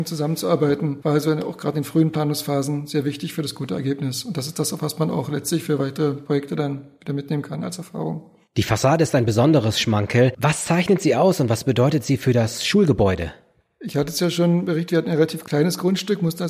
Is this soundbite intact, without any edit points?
yes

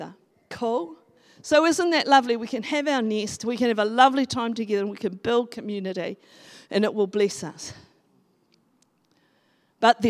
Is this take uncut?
yes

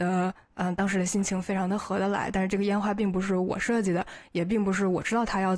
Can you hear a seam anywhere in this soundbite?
no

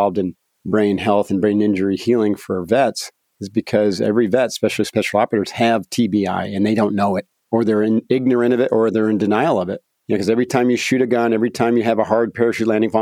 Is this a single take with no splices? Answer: yes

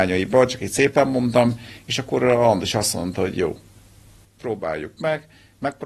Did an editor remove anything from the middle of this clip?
no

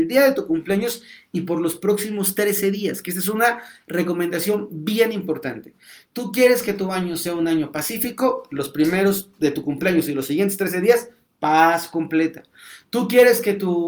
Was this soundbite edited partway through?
no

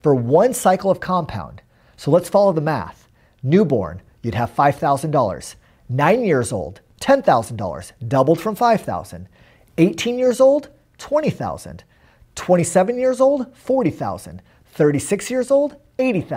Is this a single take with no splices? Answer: yes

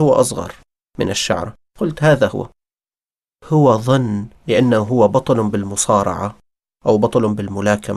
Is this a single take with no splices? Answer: yes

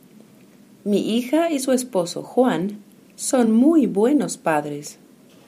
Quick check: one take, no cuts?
yes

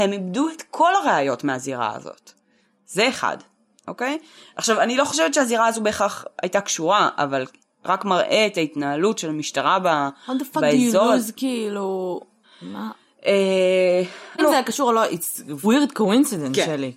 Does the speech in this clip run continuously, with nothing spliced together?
no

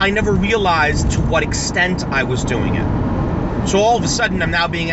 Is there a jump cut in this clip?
no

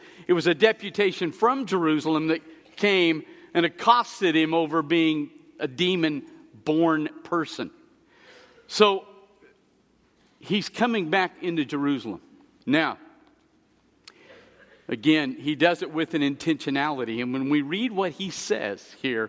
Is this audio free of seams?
yes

